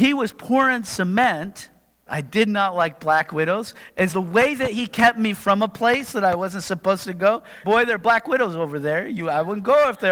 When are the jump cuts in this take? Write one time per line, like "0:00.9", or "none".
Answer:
0:02.1
0:04.1
0:07.6